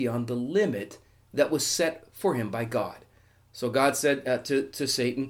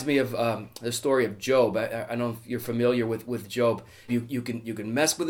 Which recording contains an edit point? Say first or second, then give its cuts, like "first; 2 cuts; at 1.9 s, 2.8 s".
second; 1 cut; at 4.1 s